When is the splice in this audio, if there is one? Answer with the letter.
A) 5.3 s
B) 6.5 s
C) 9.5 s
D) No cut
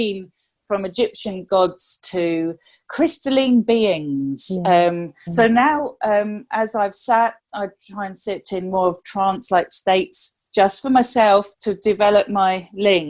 A